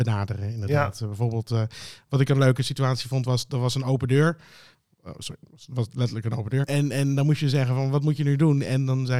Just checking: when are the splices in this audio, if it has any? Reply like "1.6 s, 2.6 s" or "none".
6.6 s